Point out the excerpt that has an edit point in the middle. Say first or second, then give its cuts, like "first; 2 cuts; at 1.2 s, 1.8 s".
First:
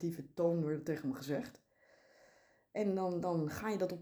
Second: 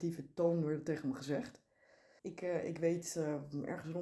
second; 1 cut; at 2.2 s